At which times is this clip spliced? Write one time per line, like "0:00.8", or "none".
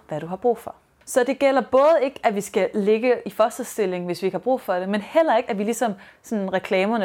none